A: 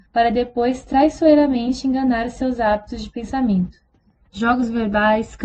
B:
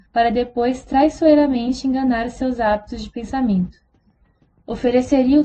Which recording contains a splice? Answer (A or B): A